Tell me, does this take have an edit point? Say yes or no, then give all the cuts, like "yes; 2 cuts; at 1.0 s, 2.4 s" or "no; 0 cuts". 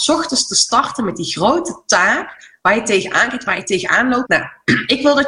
yes; 1 cut; at 4.2 s